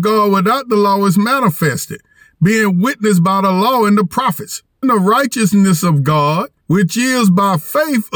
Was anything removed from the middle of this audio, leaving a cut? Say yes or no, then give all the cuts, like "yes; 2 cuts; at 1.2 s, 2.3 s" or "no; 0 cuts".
yes; 2 cuts; at 4.8 s, 6.6 s